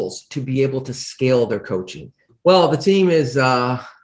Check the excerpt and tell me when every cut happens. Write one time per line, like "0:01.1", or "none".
0:02.3